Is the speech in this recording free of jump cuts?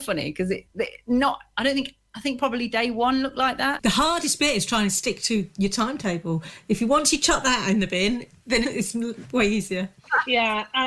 no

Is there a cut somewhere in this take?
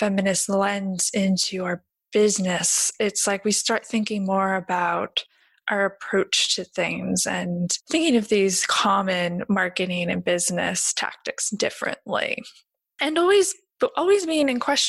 yes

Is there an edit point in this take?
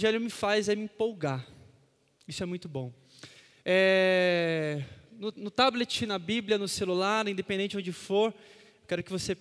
no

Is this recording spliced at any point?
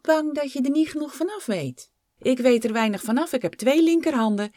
yes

